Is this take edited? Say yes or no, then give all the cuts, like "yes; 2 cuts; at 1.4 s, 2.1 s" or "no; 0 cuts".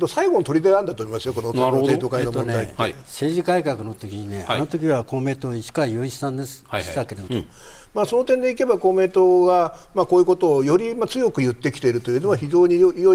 yes; 1 cut; at 7.3 s